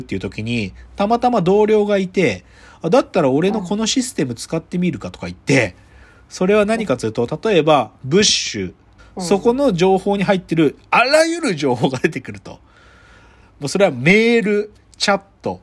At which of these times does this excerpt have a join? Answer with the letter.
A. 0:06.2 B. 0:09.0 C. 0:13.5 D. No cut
B